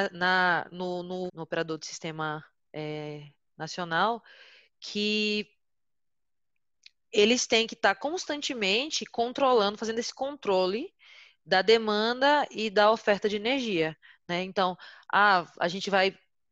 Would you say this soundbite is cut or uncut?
cut